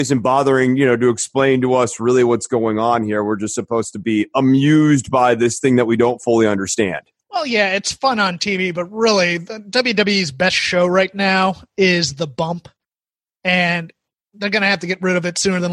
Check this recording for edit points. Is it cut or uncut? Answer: uncut